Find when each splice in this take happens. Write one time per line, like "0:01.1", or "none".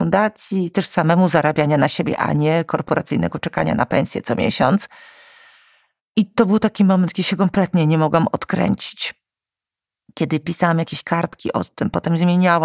none